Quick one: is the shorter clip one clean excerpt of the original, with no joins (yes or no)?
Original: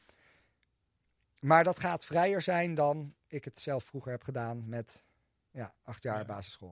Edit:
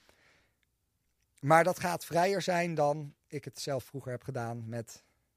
yes